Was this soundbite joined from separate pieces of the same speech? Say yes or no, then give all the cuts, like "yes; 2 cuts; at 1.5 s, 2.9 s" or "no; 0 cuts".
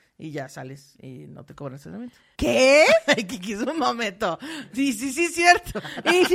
yes; 1 cut; at 2.4 s